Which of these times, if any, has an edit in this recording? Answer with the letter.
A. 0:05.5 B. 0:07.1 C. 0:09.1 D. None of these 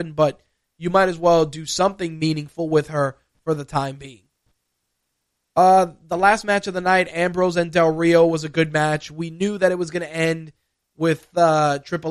D